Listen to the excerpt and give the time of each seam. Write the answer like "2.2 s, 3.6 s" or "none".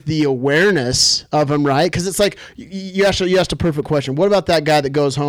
none